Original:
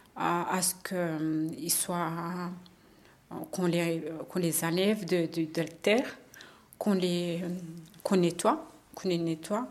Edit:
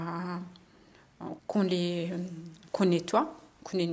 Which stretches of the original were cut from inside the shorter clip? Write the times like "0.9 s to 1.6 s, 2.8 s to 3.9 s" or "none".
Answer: 3.5 s to 6.7 s